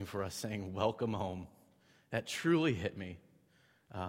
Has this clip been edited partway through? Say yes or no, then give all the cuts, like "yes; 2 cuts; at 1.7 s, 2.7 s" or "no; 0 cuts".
no; 0 cuts